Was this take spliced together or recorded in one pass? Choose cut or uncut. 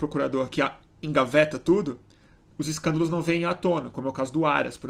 uncut